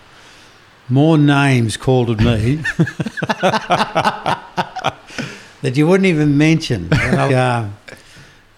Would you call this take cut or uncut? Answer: cut